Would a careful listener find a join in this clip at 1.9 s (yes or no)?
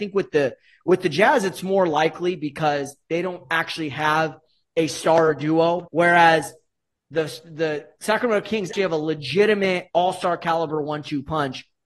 no